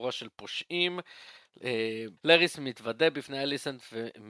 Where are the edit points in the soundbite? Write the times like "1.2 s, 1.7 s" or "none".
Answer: 2.2 s